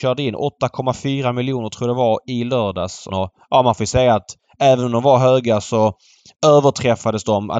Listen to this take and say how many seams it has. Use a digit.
1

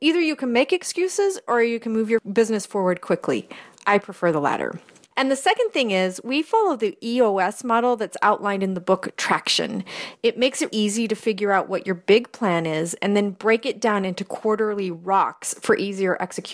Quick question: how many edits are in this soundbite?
1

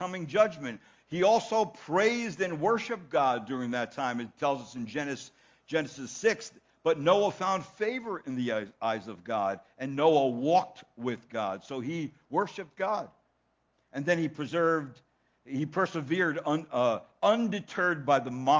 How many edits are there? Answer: 0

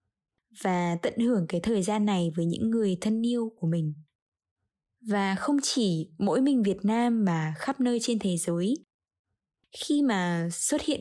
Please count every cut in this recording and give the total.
1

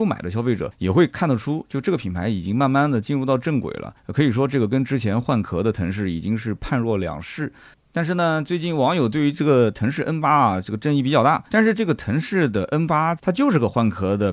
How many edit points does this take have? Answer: 2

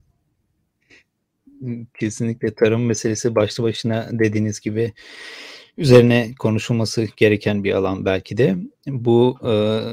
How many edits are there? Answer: 0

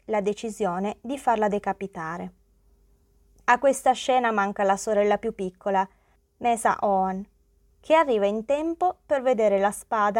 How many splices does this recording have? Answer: 1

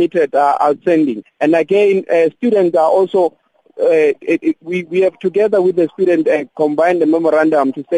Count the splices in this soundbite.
1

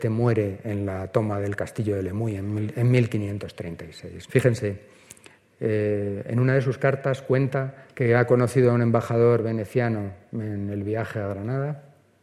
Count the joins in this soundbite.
1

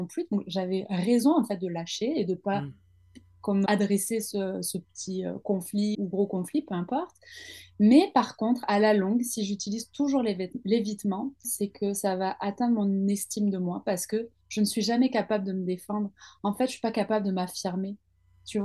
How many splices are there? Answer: 3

